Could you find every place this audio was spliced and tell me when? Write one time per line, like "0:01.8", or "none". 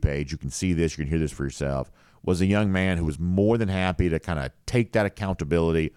none

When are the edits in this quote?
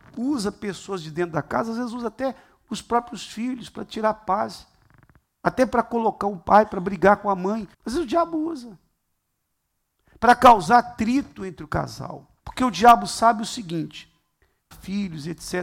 0:07.7
0:12.4
0:14.7

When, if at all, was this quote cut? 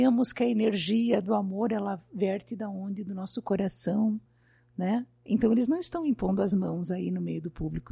none

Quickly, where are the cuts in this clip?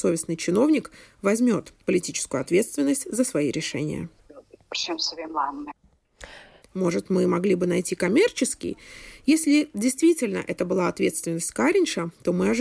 0:06.6

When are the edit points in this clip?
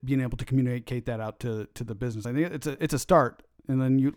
none

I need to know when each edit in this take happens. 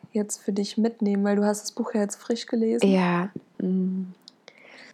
0:03.5

